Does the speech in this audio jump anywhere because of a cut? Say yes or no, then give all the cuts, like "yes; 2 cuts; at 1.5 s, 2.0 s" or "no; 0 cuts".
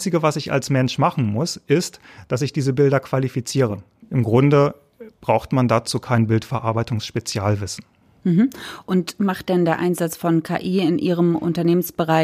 yes; 1 cut; at 4.0 s